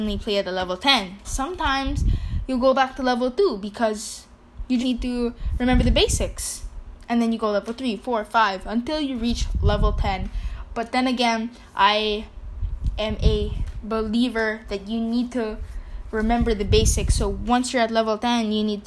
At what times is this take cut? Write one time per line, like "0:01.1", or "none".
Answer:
0:01.2
0:04.8